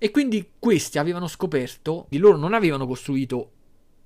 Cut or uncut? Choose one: cut